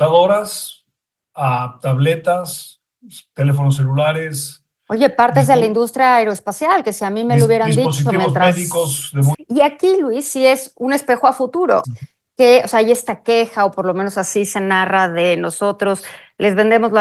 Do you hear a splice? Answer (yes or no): yes